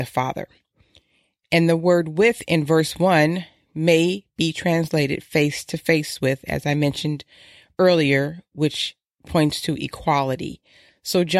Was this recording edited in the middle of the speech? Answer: no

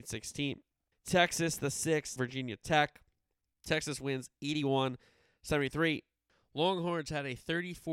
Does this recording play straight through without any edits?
no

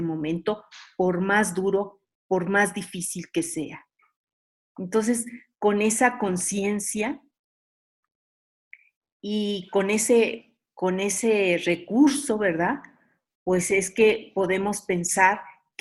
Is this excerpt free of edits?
yes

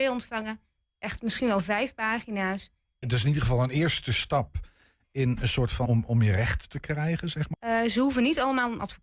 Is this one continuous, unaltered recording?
no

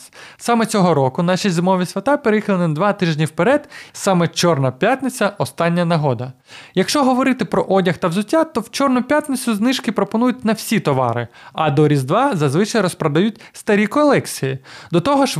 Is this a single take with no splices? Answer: no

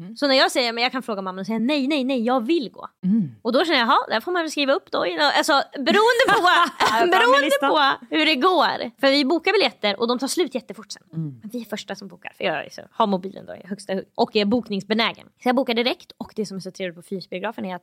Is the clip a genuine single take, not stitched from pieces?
yes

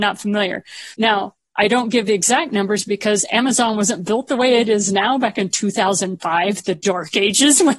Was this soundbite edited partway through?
yes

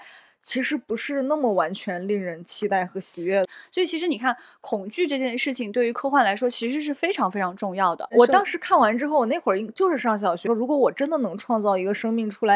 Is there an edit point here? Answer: yes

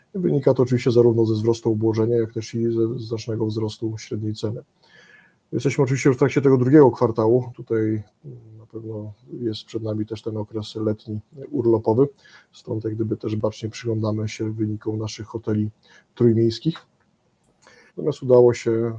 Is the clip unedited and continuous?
no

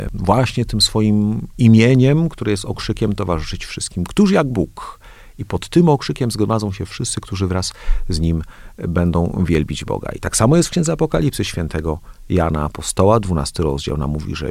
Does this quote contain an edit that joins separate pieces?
no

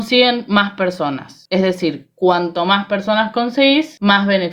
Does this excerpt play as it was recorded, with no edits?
yes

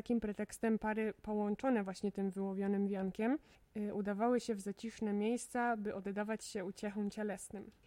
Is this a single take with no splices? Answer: yes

